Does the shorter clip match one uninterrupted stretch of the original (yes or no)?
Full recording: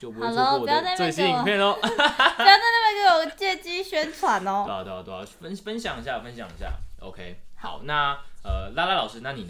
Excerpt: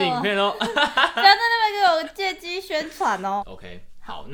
no